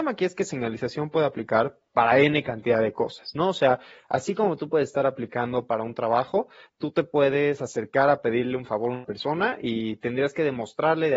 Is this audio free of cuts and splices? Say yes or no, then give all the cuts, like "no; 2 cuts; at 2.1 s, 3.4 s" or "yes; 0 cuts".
yes; 0 cuts